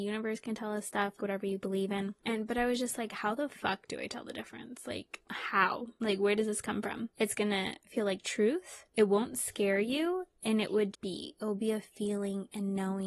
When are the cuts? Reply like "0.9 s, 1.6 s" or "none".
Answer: 1.2 s, 7.1 s, 10.9 s